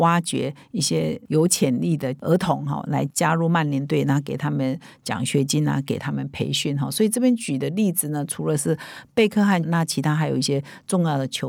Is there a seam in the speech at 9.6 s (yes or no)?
yes